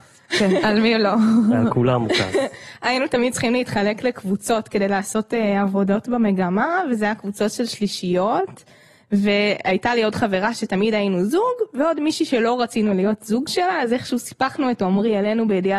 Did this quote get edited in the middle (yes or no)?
no